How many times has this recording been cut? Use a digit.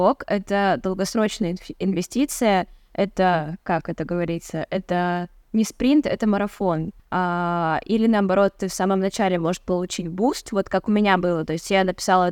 1